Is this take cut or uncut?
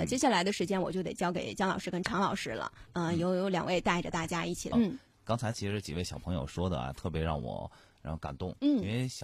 cut